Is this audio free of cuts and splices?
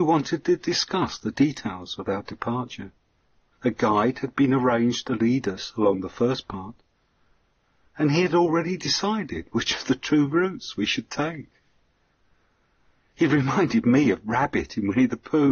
no; 1 cut; at 3.5 s

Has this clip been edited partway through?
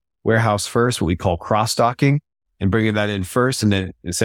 no; 0 cuts

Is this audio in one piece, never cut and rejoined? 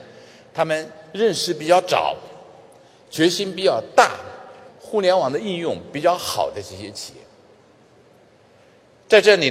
no; 1 cut; at 4.7 s

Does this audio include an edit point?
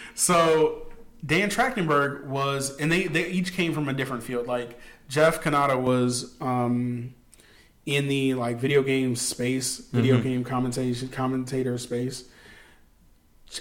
no; 0 cuts

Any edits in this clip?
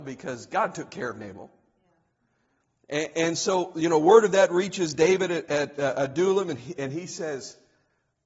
no; 0 cuts

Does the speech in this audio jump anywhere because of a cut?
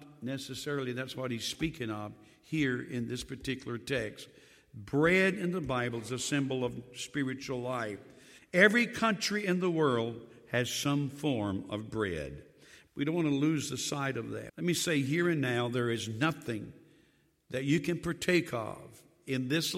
yes; 3 cuts; at 8.4 s, 12.9 s, 14.5 s

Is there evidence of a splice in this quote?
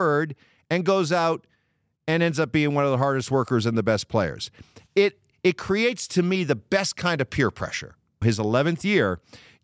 yes; 1 cut; at 8.2 s

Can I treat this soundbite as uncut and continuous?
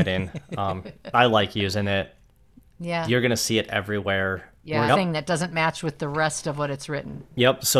no; 1 cut; at 4.9 s

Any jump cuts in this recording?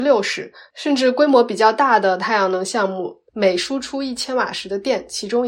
yes; 1 cut; at 3.3 s

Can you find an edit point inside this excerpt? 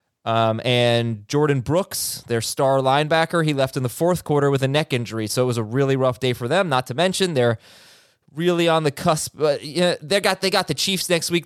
no; 0 cuts

